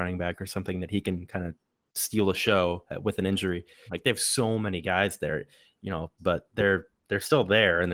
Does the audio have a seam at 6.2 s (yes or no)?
yes